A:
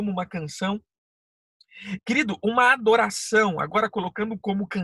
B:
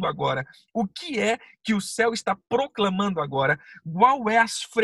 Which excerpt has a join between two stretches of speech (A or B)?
A